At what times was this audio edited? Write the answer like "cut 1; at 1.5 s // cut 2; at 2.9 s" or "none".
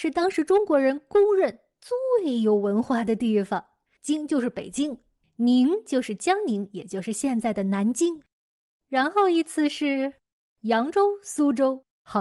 cut 1; at 3.9 s